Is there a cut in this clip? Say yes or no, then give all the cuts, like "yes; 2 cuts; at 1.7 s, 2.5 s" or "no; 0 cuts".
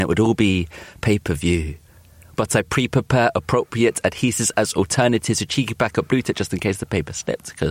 yes; 1 cut; at 2.3 s